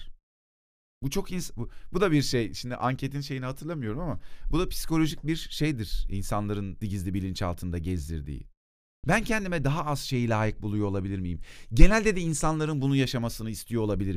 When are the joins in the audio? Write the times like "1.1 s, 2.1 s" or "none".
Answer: 6.8 s, 9.0 s